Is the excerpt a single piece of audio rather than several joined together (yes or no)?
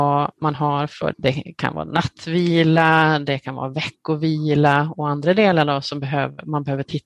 no